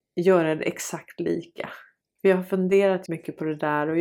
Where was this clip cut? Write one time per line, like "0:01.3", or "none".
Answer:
0:02.0
0:03.1